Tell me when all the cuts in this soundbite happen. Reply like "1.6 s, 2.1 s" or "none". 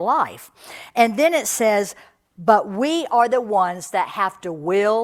none

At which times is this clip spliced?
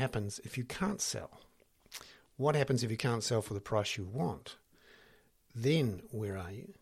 none

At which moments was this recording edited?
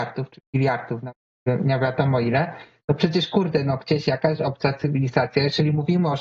none

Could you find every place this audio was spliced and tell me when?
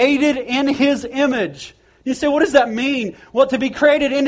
none

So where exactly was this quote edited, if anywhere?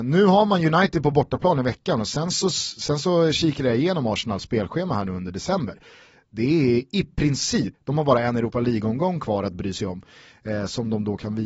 7.7 s

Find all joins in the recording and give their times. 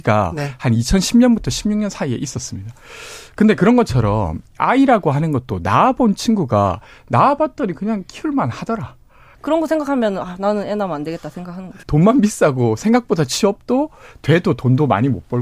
9.3 s, 11.8 s

